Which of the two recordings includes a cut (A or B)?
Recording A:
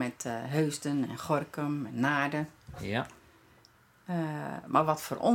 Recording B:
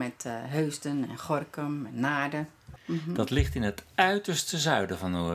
B